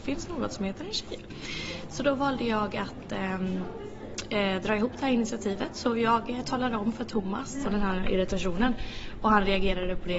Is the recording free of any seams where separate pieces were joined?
no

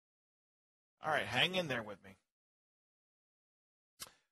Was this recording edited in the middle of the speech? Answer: yes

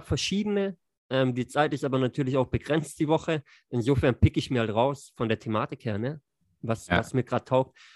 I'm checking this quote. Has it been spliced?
no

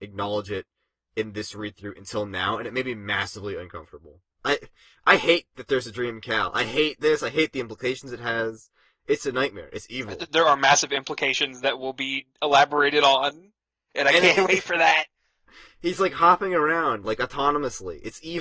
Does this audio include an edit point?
yes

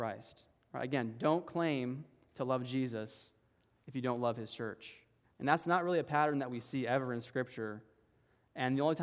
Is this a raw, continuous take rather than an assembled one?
no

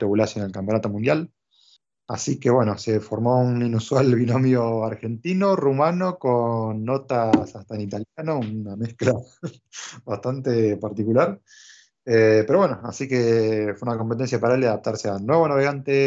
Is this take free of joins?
yes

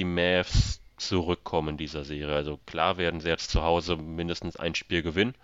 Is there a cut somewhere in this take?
no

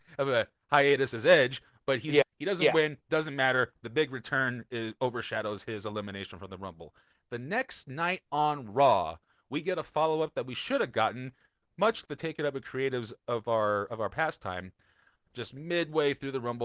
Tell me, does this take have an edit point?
yes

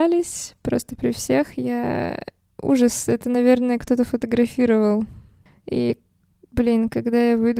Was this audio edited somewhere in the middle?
yes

